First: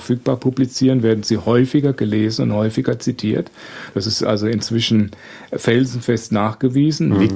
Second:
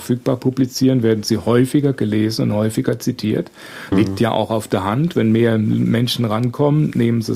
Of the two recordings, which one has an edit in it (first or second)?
second